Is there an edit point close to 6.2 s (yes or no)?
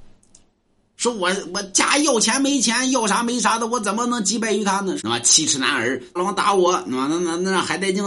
yes